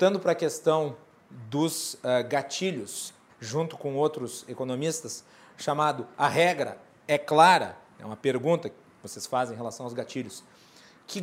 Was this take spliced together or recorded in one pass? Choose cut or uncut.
cut